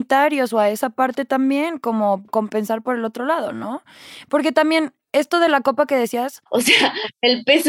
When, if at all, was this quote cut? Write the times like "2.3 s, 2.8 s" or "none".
6.5 s